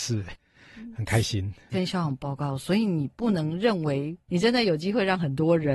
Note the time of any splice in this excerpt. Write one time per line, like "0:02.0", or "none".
0:04.3